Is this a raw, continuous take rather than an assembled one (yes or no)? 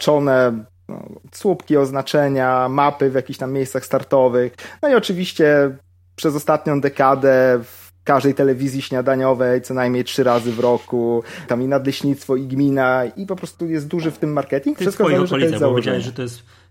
no